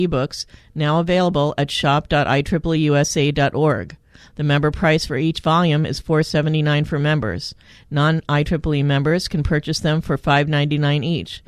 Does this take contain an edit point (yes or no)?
no